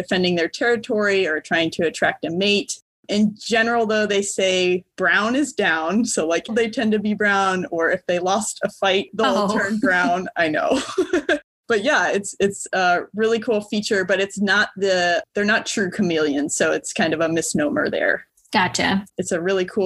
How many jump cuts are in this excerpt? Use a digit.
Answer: 1